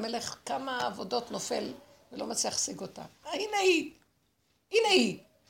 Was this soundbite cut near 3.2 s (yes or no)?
yes